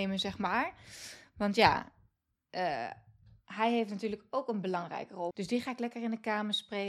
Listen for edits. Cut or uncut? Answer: cut